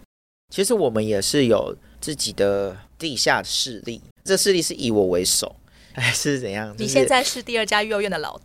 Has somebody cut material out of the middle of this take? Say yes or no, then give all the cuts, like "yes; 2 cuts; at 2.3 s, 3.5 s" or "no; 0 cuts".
yes; 1 cut; at 4.1 s